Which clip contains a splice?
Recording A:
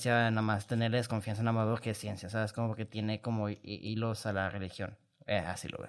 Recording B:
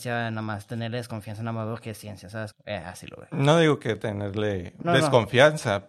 B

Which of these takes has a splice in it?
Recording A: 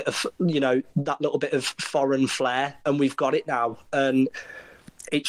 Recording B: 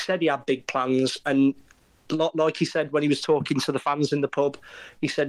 B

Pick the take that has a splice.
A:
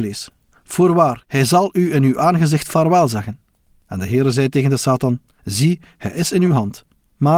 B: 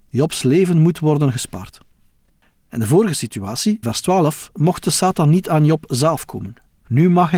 B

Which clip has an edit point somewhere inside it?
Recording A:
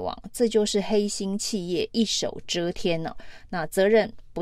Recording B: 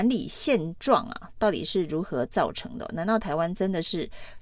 A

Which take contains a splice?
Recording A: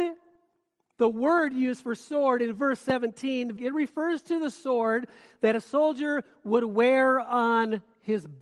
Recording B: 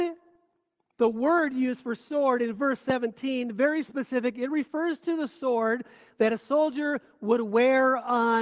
A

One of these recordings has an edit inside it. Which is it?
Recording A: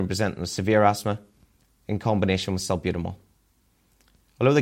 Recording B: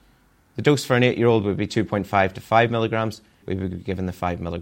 B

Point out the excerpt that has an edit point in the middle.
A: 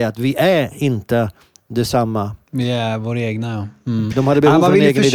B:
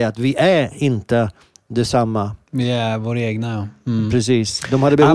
A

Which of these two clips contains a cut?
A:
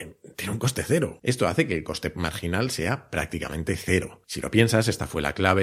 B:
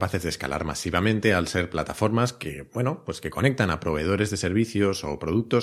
A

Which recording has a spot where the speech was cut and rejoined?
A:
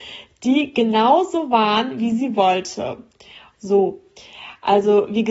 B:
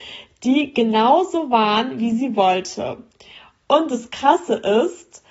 A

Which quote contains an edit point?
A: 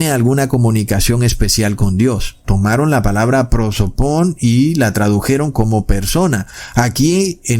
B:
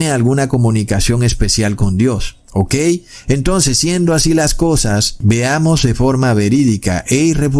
A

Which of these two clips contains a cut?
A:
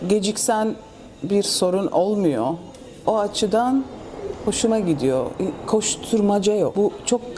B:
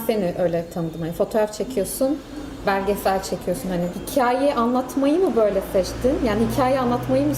A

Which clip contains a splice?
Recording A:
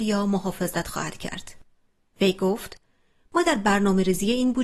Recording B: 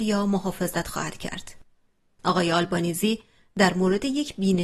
A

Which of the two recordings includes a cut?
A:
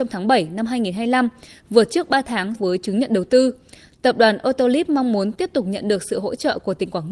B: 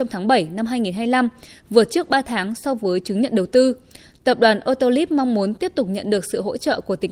A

